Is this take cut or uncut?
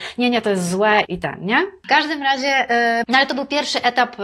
cut